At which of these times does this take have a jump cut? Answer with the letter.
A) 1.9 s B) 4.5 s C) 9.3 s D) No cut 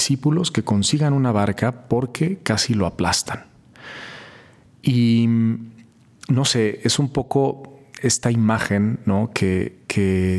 D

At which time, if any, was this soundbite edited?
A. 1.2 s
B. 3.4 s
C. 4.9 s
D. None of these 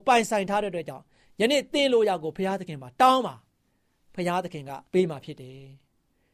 C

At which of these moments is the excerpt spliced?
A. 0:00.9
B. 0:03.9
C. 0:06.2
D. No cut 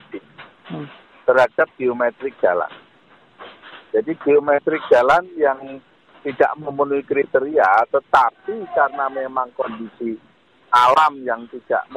D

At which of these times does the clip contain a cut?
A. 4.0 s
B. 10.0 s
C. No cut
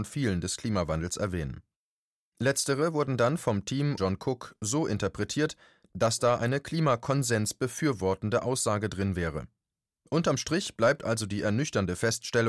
A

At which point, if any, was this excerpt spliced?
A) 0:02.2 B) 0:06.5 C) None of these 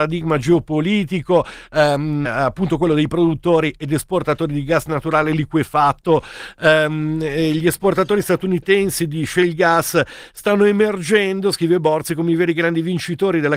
A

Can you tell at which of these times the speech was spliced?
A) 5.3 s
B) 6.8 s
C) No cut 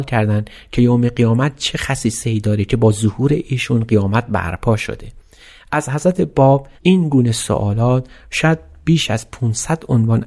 B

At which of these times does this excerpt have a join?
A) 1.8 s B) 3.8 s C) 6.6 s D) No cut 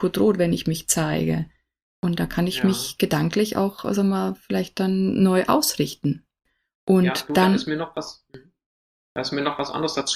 A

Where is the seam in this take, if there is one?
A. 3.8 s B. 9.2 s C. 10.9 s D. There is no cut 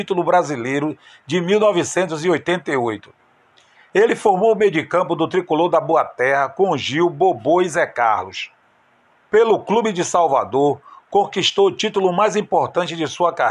B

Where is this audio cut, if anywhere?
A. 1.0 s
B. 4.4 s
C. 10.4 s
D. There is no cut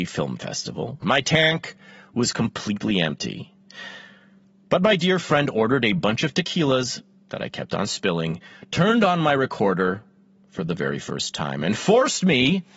A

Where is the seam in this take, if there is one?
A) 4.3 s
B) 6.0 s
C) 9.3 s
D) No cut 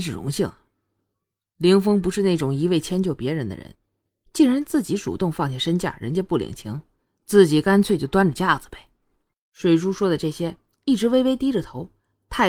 C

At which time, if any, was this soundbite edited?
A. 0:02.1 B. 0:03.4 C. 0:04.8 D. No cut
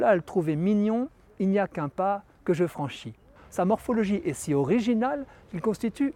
B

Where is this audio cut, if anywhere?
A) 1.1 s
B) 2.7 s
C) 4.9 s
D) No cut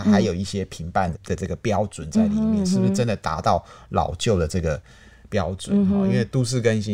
A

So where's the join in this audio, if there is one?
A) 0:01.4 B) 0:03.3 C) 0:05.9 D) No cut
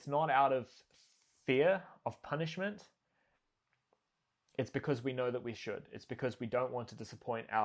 D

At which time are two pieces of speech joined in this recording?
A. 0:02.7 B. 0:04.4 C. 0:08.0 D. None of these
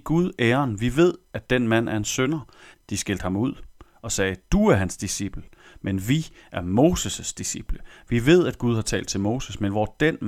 A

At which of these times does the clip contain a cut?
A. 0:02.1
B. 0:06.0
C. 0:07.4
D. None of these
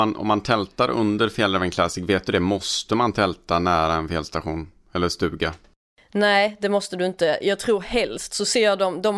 D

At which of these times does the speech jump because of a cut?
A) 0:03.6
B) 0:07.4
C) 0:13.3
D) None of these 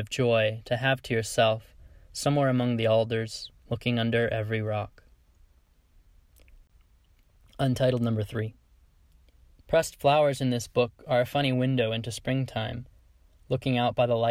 A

